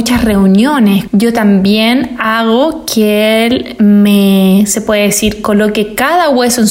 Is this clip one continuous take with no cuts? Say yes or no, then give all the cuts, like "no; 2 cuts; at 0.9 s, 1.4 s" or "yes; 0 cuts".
no; 1 cut; at 1.1 s